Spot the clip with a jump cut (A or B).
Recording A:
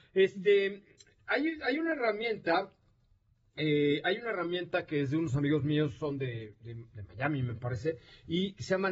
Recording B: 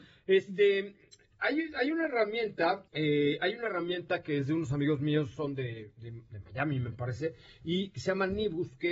B